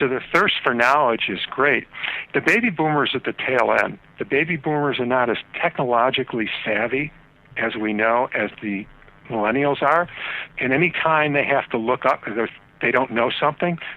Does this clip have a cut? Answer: yes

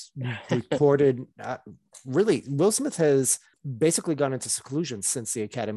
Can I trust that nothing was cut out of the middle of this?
yes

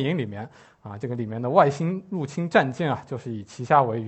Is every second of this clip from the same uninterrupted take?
yes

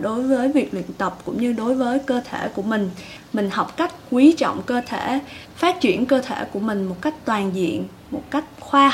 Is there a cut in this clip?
no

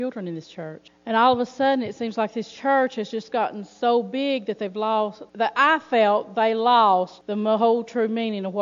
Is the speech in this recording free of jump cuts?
yes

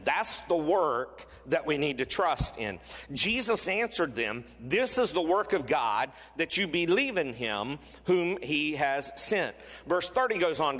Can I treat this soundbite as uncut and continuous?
yes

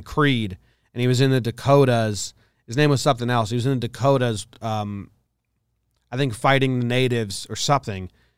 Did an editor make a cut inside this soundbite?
no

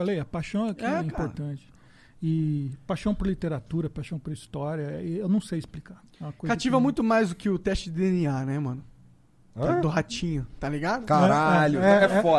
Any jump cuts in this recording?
no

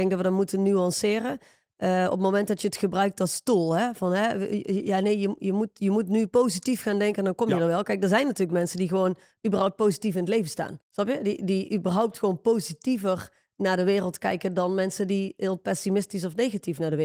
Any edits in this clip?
yes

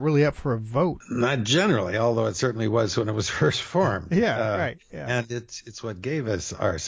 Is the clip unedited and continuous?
yes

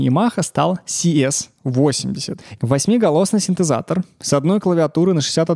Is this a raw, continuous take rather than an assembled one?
no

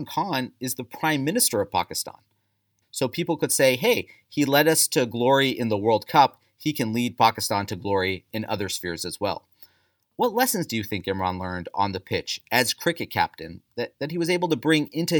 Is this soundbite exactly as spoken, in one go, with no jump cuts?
no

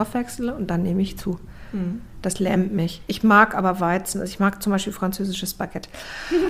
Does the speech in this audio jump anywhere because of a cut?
no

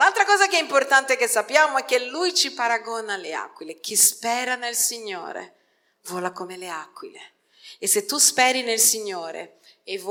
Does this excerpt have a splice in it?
no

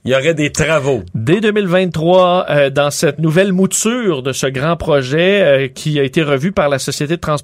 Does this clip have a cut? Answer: yes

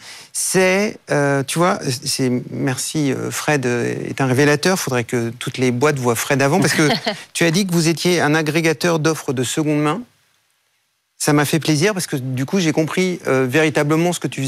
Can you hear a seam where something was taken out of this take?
no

